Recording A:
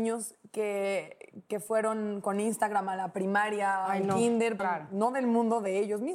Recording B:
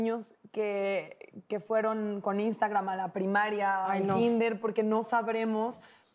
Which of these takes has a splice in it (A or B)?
A